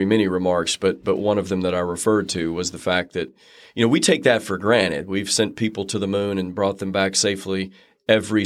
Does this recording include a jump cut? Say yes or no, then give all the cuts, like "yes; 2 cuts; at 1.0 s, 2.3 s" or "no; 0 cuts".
no; 0 cuts